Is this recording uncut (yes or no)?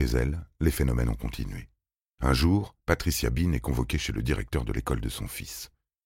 no